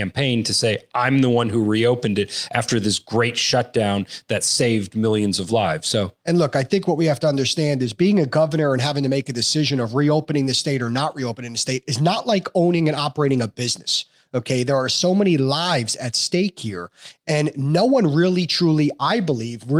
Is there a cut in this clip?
no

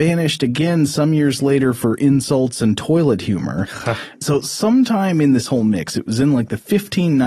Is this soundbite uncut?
yes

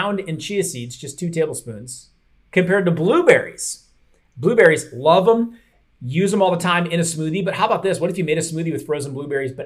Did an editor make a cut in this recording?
no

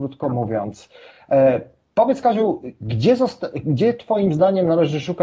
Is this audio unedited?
yes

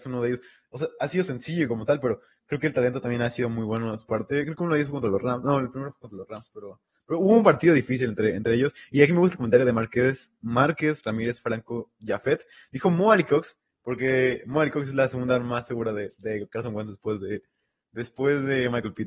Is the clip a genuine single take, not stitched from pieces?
yes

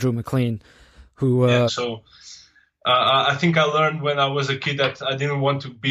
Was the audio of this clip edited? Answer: yes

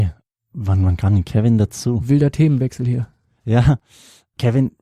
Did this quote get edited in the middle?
no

